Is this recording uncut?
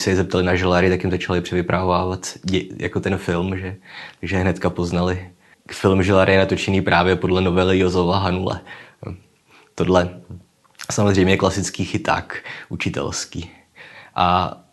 no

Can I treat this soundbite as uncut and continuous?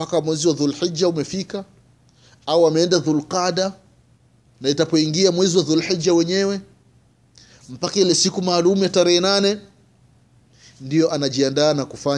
no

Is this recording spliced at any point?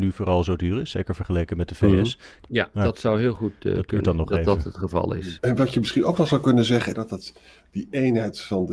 yes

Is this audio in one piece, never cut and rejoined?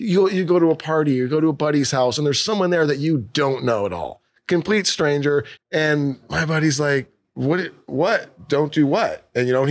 no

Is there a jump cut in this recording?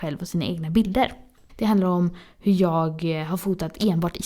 yes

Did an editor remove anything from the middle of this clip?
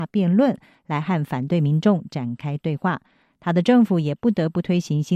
no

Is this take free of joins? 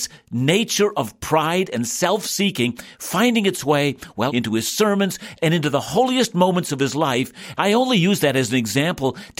no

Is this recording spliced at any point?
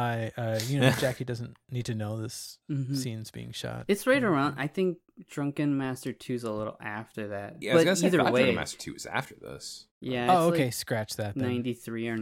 no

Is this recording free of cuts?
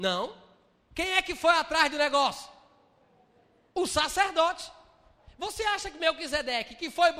yes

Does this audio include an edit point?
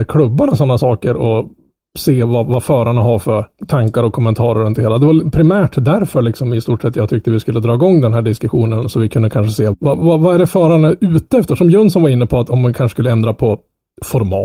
no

